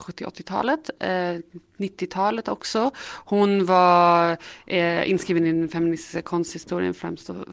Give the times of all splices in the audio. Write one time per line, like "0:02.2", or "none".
none